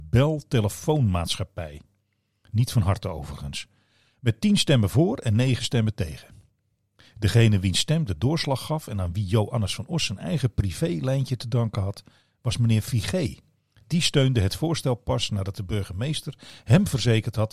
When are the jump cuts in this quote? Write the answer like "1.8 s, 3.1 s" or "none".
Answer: none